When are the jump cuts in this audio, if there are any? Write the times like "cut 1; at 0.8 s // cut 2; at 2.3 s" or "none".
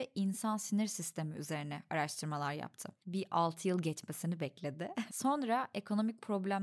cut 1; at 3.0 s // cut 2; at 5.1 s